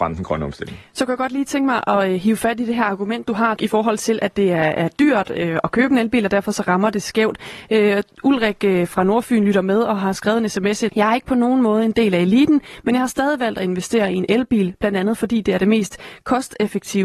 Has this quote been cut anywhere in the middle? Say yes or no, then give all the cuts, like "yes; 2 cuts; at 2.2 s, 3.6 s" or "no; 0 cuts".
yes; 2 cuts; at 3.6 s, 10.9 s